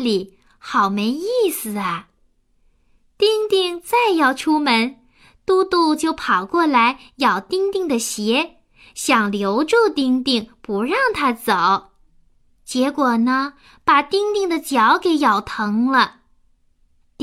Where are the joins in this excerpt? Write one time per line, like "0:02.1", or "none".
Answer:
none